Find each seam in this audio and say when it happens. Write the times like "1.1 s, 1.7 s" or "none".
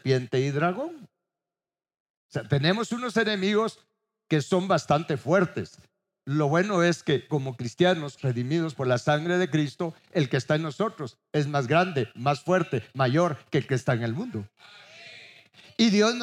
8.2 s